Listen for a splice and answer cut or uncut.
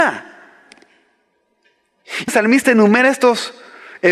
cut